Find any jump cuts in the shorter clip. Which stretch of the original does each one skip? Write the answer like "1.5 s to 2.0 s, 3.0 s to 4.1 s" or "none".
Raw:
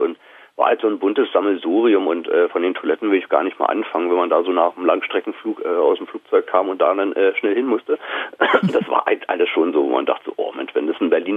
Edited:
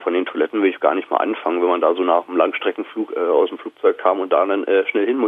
none